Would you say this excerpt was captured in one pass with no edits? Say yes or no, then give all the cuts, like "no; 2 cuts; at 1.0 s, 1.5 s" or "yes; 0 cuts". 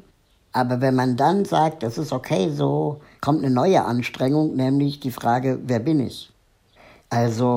no; 1 cut; at 3.2 s